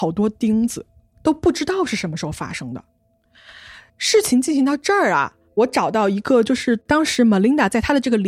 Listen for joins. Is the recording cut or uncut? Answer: uncut